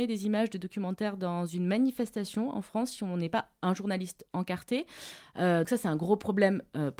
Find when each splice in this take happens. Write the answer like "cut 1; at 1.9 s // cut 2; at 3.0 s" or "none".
cut 1; at 5.6 s